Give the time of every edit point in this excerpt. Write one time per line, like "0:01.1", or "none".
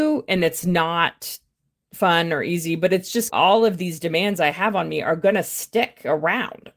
none